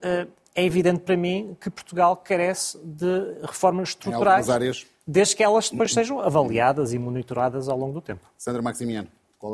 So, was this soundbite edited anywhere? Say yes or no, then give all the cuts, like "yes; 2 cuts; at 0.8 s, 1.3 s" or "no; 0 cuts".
no; 0 cuts